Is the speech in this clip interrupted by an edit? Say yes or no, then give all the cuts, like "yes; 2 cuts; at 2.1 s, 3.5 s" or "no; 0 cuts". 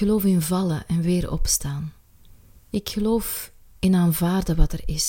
yes; 1 cut; at 2.6 s